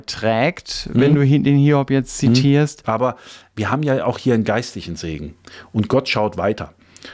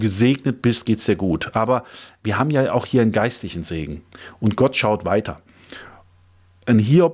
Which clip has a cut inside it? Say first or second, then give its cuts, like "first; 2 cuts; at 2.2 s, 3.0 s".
first; 1 cut; at 2.8 s